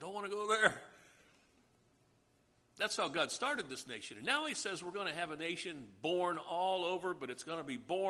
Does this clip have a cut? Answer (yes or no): no